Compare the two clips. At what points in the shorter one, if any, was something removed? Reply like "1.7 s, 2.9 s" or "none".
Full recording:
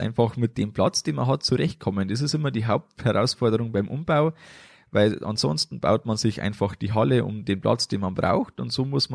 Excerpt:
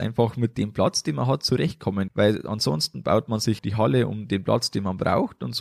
2.1 s, 3.6 s